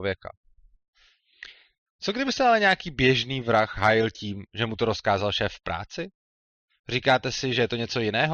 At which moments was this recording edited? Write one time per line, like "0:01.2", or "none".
0:01.9